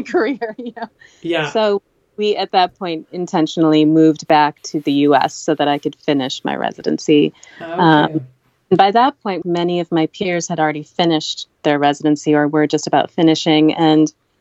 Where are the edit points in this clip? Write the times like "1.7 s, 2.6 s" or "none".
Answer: 9.4 s